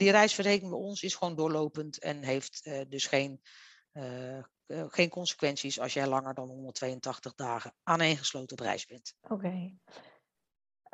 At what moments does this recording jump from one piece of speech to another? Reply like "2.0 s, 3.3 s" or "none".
9.2 s